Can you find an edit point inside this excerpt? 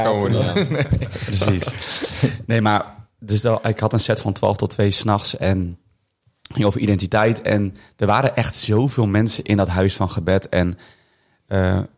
no; 0 cuts

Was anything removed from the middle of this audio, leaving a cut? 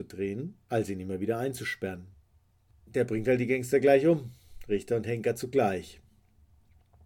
yes; 1 cut; at 2.7 s

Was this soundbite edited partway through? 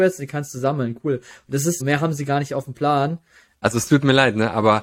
yes; 2 cuts; at 1.8 s, 3.6 s

